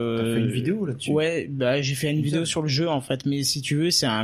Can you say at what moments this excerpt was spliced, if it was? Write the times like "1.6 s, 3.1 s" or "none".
none